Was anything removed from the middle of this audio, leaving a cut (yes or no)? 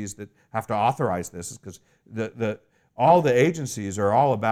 no